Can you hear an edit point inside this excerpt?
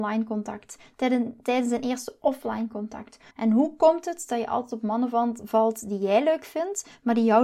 yes; 1 cut; at 3.3 s

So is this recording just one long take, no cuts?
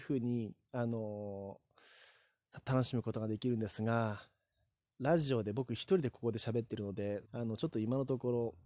no; 1 cut; at 7.3 s

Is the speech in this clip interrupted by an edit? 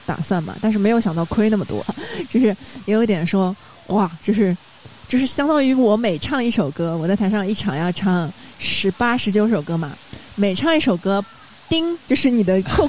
yes; 1 cut; at 1.8 s

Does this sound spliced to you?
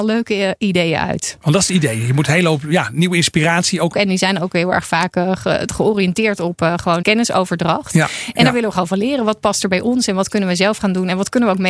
yes; 2 cuts; at 3.9 s, 7.0 s

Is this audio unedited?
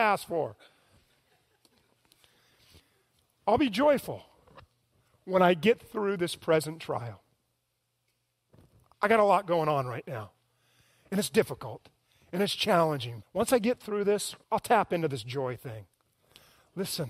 no; 2 cuts; at 13.2 s, 14.4 s

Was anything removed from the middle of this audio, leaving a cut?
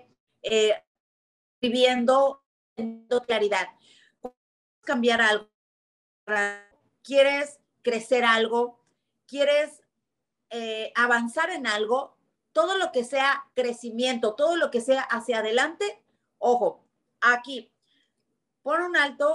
no; 0 cuts

